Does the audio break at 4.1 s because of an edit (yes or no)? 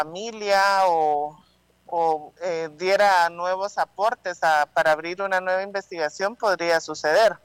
no